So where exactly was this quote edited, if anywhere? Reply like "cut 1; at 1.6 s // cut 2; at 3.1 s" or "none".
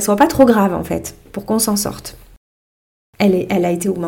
cut 1; at 3.1 s